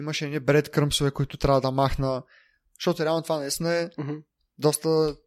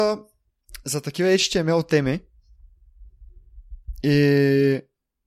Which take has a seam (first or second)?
first